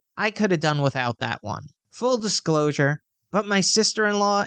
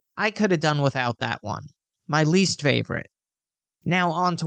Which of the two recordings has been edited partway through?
first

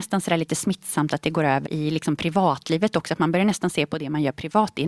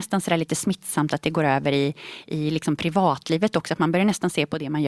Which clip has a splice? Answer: first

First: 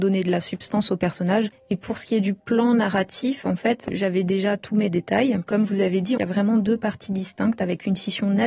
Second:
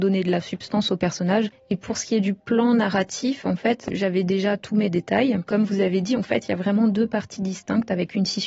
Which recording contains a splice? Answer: first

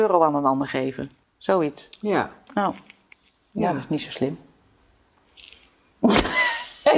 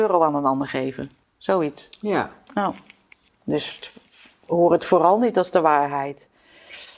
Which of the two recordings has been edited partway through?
second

